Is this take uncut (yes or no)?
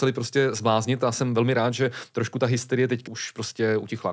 no